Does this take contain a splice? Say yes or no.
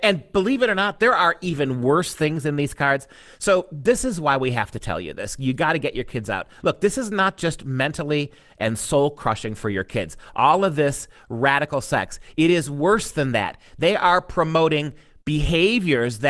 no